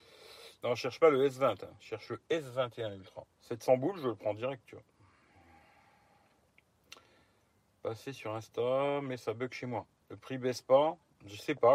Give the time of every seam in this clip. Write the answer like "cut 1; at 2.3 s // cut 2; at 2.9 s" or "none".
cut 1; at 3.3 s // cut 2; at 10.0 s